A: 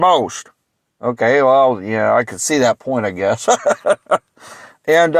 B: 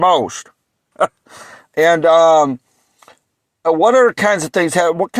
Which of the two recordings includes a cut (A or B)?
B